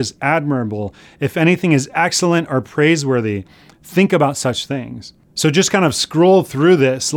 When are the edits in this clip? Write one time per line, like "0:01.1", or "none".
0:05.2